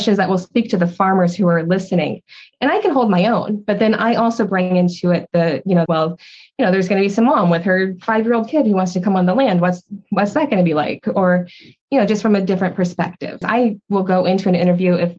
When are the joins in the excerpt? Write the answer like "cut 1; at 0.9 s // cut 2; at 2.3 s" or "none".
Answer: cut 1; at 5.9 s // cut 2; at 13.4 s